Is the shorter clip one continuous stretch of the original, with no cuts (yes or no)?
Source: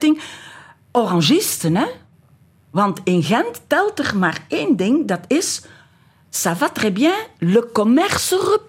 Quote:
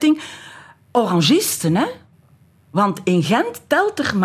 yes